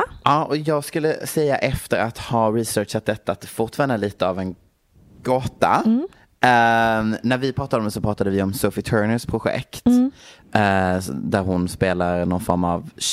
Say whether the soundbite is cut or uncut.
uncut